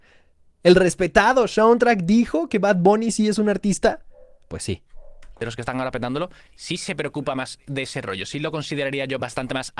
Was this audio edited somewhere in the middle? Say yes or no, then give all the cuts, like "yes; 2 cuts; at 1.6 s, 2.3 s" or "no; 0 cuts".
no; 0 cuts